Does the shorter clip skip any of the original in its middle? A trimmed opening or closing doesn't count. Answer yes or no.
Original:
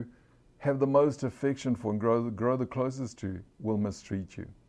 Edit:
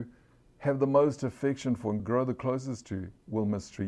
yes